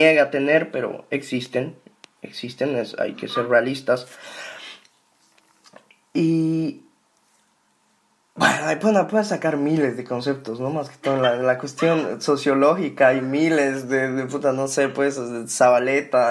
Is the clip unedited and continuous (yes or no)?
yes